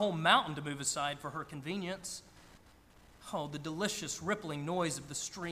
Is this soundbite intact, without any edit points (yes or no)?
yes